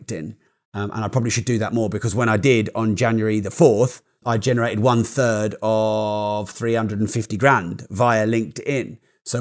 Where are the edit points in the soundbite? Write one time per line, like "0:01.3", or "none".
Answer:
0:04.2

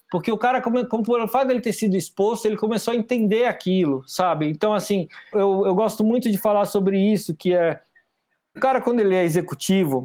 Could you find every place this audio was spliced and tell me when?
0:05.3
0:08.6

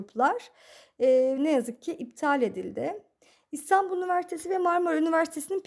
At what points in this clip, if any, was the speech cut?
0:01.4

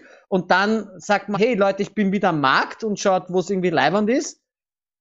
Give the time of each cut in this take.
0:01.3

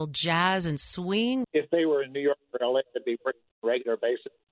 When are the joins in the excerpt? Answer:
0:01.4

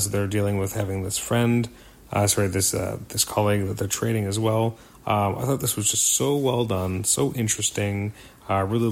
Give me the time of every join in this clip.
none

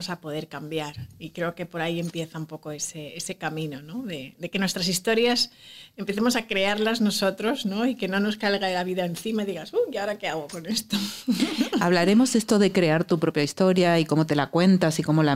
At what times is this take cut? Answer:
none

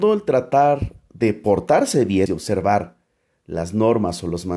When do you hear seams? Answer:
0:02.3

